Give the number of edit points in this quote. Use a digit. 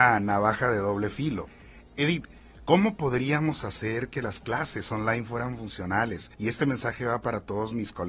1